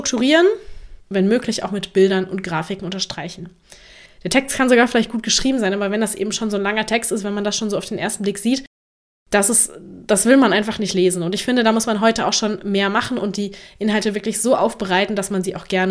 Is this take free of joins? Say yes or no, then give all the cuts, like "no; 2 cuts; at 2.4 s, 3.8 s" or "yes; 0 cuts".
no; 2 cuts; at 1.0 s, 4.1 s